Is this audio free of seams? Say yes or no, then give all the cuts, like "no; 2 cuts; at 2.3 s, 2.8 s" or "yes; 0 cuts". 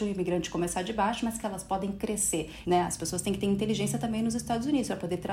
no; 1 cut; at 2.6 s